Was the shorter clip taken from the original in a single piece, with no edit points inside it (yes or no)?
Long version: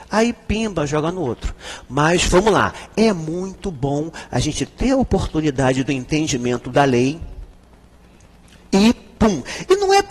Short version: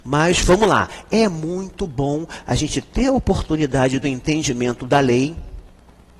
yes